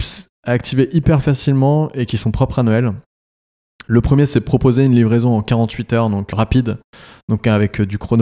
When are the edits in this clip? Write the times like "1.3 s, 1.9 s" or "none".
6.3 s